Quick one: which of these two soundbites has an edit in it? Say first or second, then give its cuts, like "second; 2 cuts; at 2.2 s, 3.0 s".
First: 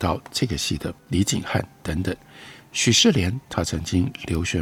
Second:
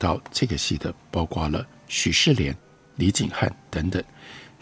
first; 1 cut; at 1.0 s